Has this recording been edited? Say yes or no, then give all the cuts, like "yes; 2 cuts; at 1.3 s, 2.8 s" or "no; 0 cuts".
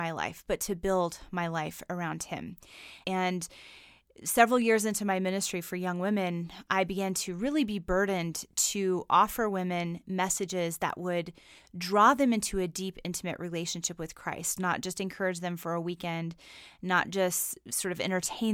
yes; 2 cuts; at 3.0 s, 14.6 s